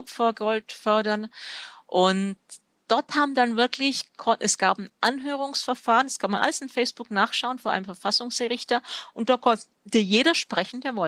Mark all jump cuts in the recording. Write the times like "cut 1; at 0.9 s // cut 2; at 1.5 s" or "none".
none